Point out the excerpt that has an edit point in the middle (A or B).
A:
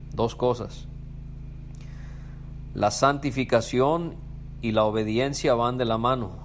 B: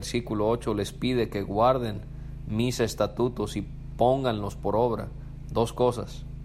B